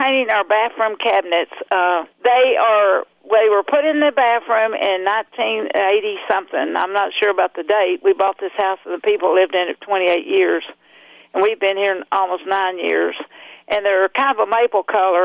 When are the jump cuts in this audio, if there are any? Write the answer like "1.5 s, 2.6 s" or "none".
2.1 s